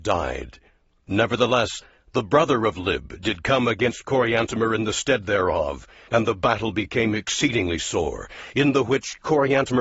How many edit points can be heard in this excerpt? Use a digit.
0